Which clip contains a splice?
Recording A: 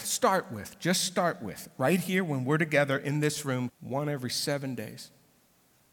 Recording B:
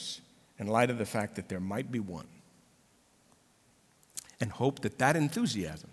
A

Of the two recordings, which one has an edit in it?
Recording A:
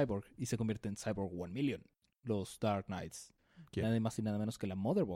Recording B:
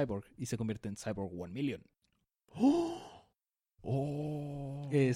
A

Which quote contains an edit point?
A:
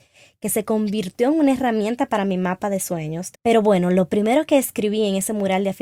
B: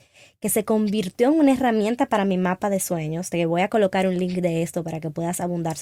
A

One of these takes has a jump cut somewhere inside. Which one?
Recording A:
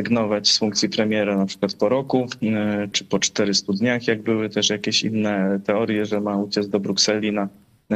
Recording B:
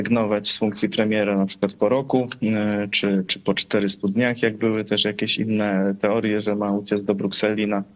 A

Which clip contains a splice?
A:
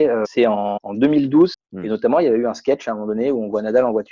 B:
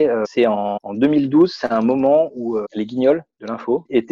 A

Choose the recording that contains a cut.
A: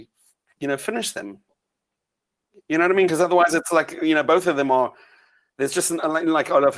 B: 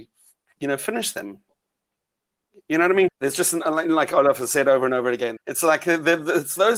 B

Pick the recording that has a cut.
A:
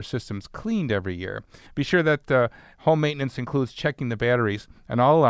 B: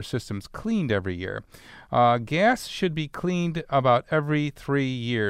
A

